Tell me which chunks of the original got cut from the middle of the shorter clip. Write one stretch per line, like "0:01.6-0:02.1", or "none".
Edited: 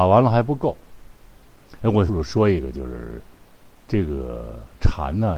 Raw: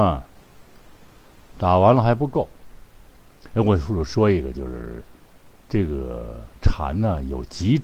0:03.8-0:03.9